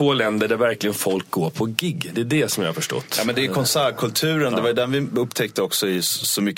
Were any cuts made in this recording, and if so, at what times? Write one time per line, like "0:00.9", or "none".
none